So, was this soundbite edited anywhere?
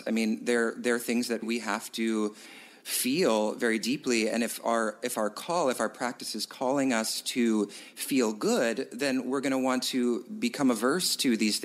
yes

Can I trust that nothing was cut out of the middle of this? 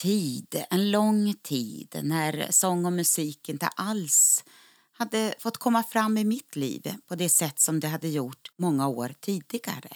no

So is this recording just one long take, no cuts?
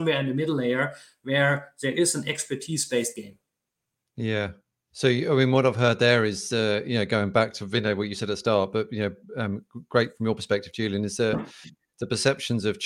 yes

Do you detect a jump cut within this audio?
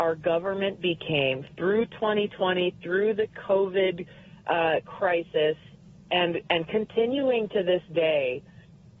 no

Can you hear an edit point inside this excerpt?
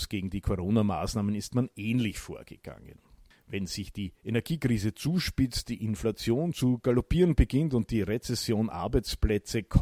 no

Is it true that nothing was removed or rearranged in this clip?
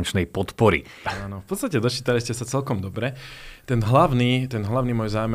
no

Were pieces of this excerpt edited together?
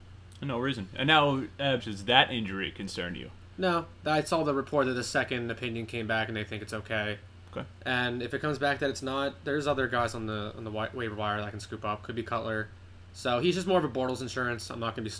yes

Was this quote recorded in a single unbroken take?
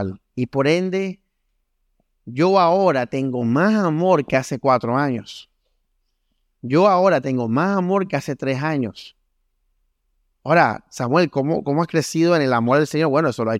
yes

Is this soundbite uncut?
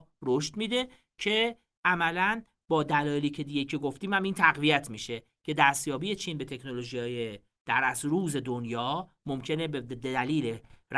yes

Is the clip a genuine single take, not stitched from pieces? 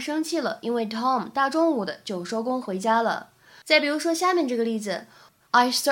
no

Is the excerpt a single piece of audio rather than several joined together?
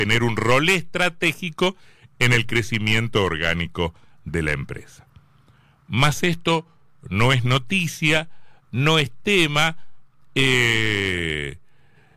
yes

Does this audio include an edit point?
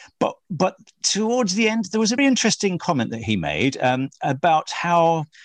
yes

